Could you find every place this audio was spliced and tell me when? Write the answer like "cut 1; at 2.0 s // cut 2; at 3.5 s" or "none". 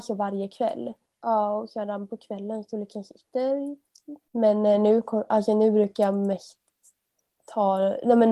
cut 1; at 1.1 s // cut 2; at 4.3 s